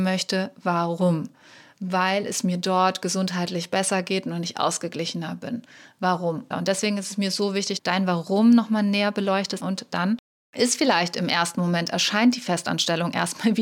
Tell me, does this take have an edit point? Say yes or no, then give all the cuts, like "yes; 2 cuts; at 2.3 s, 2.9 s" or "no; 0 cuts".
yes; 3 cuts; at 6.5 s, 7.8 s, 9.6 s